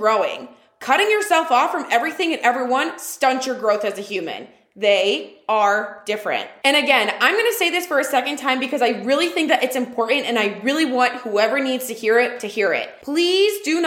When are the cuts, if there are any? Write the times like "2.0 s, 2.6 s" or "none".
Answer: none